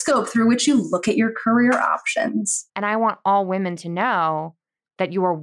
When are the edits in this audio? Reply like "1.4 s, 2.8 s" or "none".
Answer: 2.7 s

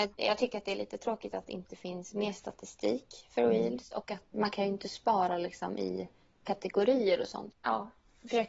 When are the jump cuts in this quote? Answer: 4.3 s, 7.5 s

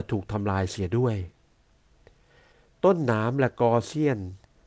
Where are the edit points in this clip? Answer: none

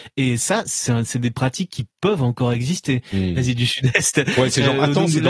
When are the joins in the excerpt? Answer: 3.4 s

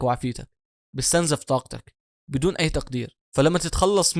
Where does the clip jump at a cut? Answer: 3.2 s

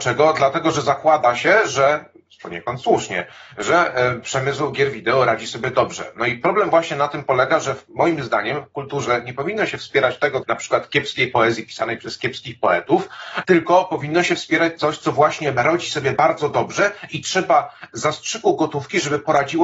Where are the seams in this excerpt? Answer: 10.4 s, 13.4 s

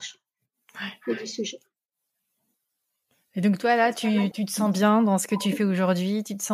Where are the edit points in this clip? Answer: 4.3 s

